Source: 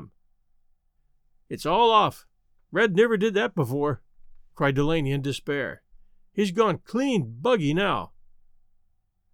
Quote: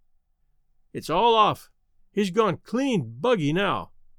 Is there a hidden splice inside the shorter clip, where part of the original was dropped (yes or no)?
yes